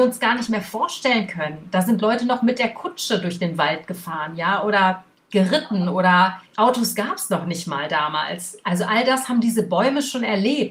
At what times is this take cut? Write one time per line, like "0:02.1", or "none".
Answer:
none